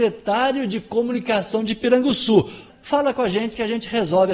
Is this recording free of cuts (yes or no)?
no